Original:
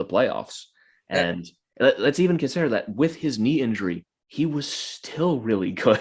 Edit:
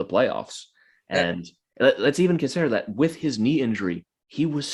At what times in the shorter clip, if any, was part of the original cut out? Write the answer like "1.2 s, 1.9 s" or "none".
none